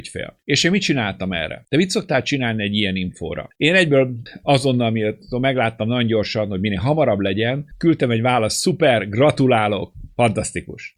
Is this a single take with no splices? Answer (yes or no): yes